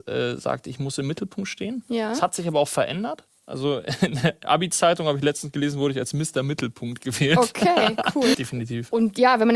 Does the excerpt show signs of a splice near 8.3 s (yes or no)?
yes